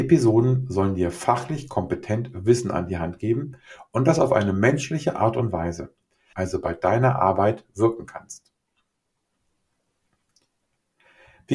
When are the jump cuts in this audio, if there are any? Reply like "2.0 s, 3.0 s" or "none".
6.3 s

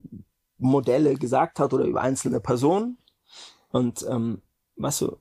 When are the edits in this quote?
none

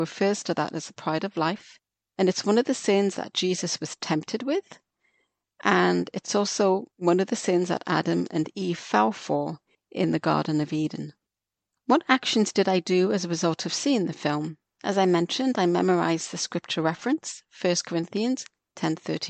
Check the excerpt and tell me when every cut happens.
none

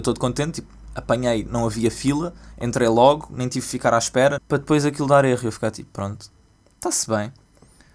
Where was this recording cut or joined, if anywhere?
4.4 s

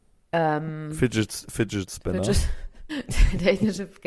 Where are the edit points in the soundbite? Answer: 2.9 s

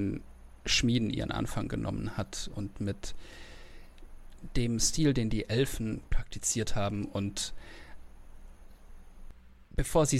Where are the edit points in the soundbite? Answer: none

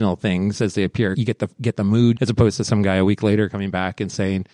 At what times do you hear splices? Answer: 1.1 s, 2.2 s

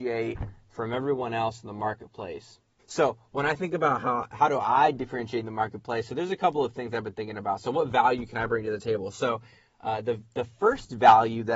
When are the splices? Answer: 2.8 s

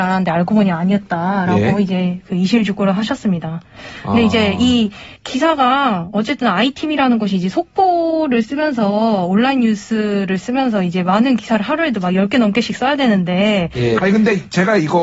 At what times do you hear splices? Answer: 5.2 s, 14.0 s

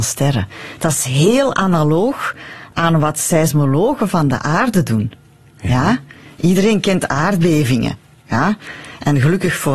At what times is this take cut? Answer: none

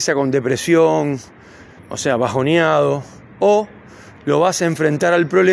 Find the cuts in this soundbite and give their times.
1.8 s

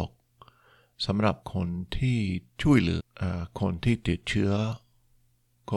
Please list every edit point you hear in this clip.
1.4 s, 3.0 s

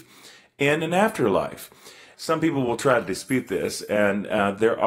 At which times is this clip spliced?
2.1 s

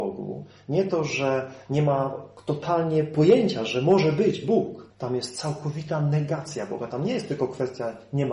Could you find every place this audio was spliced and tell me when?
4.9 s

